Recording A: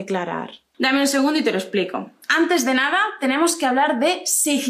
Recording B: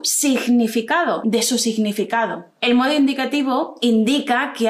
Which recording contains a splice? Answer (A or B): B